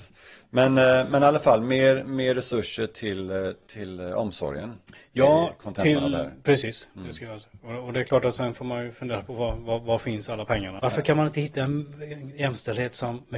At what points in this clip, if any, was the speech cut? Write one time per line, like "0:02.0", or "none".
0:10.8